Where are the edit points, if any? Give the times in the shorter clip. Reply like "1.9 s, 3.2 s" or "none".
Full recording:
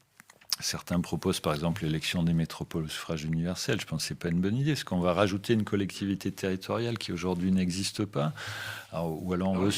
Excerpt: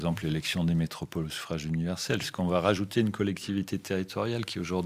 2.2 s